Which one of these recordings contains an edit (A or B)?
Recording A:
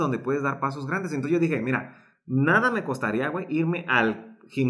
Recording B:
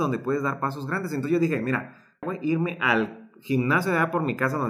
B